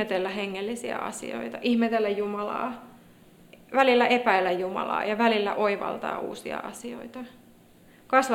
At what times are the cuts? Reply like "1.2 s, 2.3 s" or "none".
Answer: none